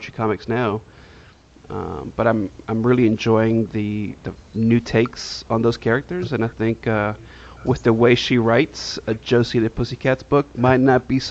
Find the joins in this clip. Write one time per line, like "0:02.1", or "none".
none